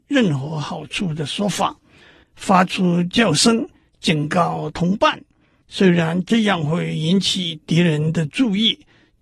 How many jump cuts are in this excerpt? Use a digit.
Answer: 1